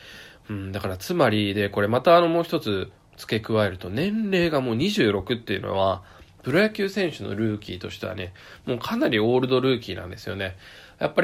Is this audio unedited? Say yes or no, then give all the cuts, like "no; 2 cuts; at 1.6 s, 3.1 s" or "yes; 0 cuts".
yes; 0 cuts